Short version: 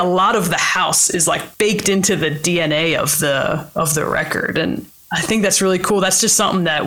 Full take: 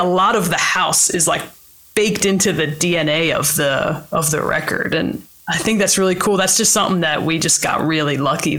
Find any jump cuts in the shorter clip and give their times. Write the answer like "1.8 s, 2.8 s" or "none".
1.5 s